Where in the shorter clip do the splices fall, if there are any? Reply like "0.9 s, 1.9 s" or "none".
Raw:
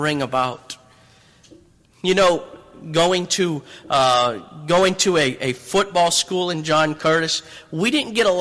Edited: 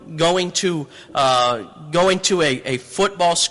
none